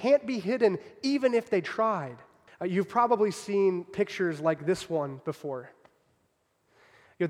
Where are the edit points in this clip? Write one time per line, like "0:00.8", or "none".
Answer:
0:02.5